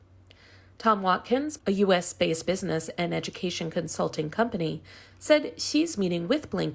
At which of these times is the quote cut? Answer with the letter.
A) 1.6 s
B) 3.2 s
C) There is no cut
A